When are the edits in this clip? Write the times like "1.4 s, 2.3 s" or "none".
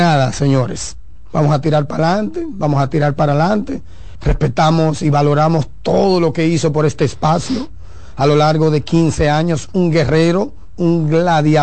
4.2 s